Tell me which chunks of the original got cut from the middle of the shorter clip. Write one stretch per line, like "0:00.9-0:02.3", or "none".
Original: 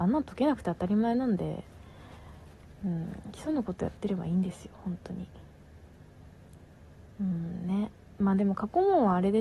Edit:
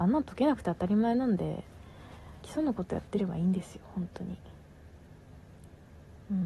0:02.4-0:03.3